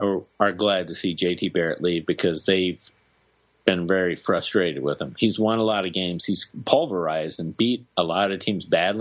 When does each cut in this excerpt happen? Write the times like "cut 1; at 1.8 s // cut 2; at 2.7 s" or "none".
none